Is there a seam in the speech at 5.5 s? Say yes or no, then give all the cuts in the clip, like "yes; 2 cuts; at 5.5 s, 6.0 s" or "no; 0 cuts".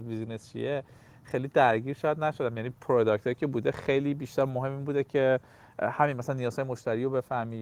no; 0 cuts